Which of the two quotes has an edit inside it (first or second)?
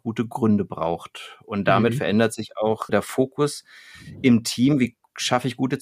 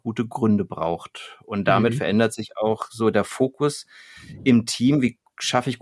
first